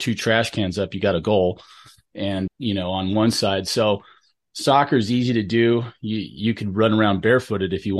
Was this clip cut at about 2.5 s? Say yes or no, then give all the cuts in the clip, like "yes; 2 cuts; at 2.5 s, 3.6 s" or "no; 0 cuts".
yes; 1 cut; at 2.5 s